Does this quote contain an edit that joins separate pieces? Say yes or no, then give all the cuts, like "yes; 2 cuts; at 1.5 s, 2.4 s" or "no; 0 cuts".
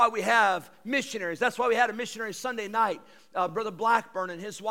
no; 0 cuts